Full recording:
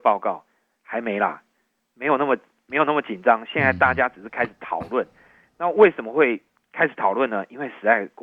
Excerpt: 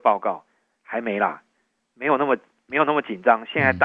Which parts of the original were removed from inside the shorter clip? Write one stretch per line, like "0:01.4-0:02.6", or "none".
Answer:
none

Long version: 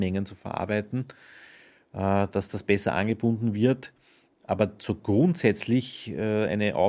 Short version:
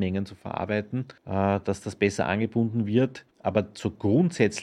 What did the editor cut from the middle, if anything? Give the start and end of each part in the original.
0:01.2-0:01.9
0:04.0-0:04.4

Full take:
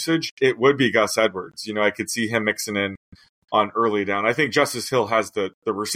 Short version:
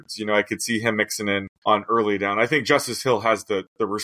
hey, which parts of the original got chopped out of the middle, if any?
0:03.0-0:03.4

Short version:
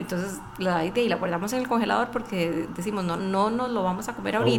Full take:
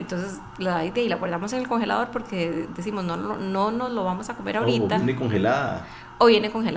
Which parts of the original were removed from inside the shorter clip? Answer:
0:03.2-0:03.4

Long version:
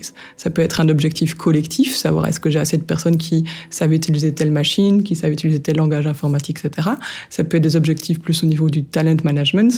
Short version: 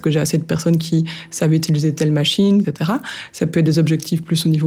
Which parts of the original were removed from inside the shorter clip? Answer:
0:05.0-0:06.6

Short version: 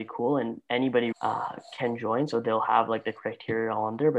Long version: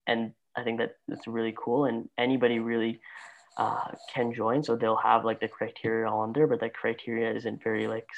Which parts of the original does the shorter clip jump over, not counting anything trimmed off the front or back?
0:02.6-0:03.5

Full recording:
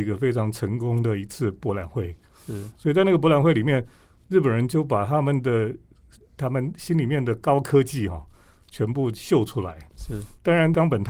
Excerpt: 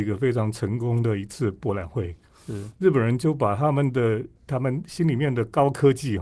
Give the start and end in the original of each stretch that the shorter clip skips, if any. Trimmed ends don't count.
0:02.7-0:04.2
0:05.9-0:06.3

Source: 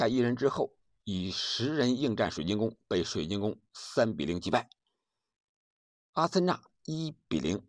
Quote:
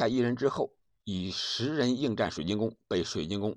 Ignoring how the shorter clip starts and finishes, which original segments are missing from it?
none

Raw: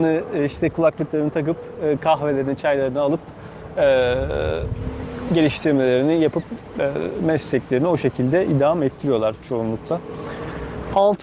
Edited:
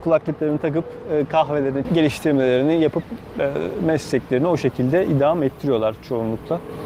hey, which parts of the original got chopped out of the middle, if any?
0:02.6-0:05.2

